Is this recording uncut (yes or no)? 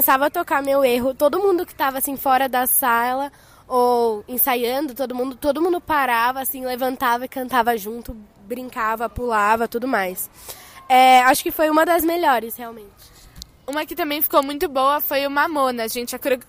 yes